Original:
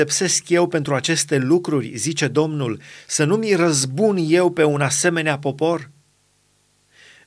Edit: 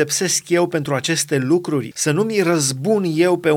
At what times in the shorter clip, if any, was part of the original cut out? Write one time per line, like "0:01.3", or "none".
0:01.9